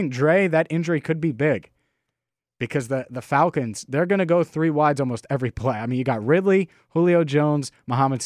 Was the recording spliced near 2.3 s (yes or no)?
no